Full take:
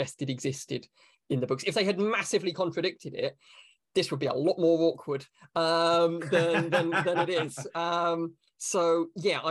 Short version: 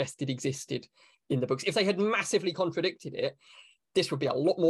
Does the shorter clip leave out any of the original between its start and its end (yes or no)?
no